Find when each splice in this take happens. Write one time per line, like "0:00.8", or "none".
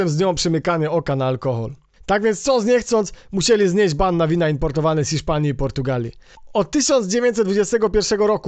0:02.0